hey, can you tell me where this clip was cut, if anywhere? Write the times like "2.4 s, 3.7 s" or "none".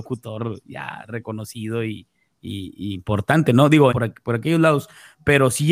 3.9 s